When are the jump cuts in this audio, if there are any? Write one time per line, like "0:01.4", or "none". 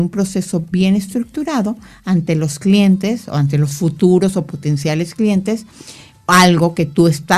none